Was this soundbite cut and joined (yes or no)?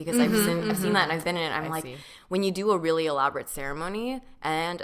no